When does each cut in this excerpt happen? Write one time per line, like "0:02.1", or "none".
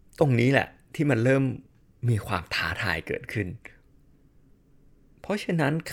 none

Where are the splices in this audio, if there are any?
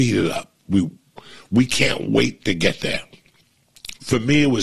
none

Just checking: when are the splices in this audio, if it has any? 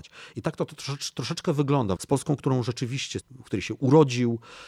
0:02.0
0:03.2

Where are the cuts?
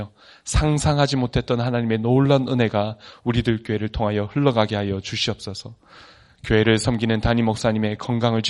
none

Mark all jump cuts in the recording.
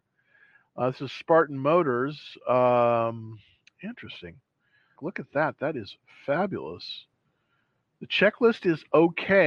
0:05.0

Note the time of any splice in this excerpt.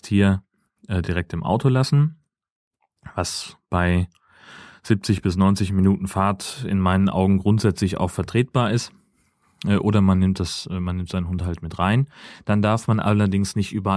none

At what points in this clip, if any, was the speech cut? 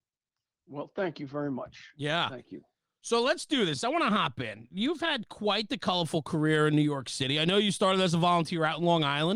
none

